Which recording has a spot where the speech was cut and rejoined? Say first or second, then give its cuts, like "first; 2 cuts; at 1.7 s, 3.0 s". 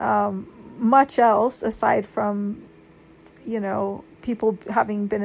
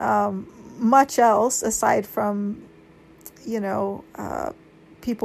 first; 1 cut; at 4.1 s